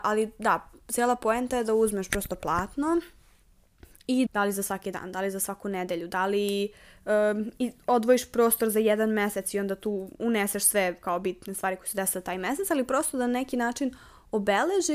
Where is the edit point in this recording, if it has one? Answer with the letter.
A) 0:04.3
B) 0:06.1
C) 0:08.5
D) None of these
A